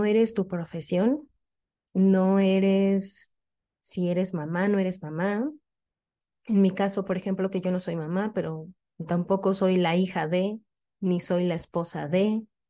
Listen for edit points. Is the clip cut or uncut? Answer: uncut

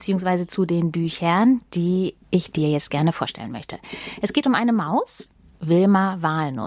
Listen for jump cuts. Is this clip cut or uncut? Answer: uncut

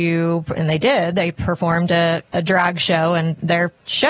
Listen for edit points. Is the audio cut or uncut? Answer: uncut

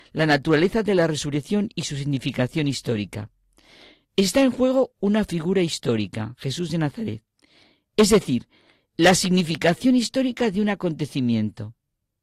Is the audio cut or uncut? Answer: uncut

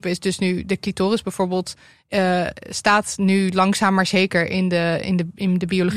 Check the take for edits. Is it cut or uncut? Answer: uncut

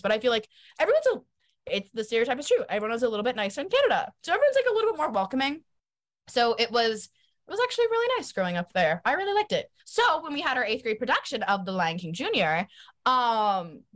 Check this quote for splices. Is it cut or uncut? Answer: cut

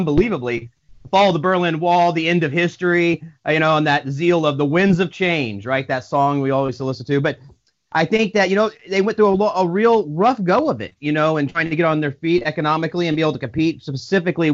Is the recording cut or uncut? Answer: uncut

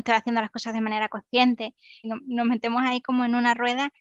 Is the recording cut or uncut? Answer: cut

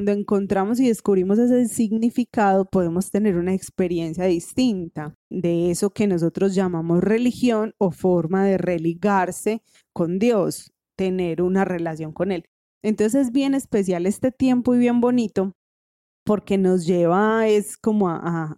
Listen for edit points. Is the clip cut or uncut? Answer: cut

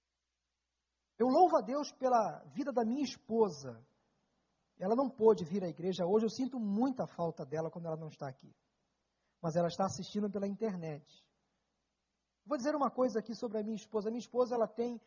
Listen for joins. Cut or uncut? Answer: uncut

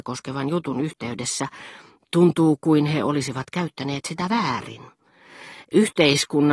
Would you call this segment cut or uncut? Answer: uncut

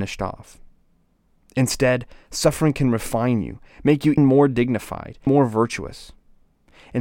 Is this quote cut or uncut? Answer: cut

